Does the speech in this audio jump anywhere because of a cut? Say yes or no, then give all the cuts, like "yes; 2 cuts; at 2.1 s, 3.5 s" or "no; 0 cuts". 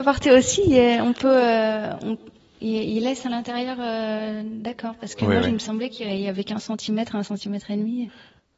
no; 0 cuts